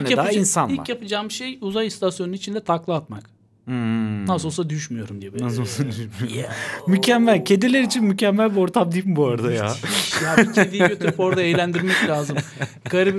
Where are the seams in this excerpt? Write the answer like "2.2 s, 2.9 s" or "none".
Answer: none